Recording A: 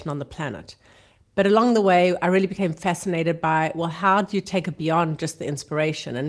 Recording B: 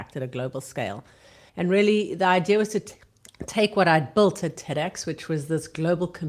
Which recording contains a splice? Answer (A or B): B